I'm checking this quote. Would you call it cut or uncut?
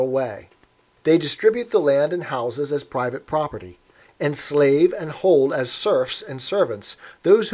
uncut